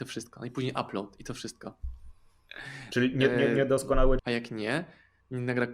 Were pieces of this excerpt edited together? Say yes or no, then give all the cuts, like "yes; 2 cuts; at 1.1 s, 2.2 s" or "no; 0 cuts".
yes; 1 cut; at 4.2 s